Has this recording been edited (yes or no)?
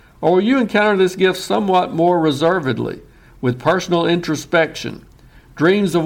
no